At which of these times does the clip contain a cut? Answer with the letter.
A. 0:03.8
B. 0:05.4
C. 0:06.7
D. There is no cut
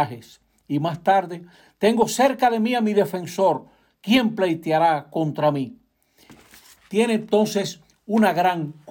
D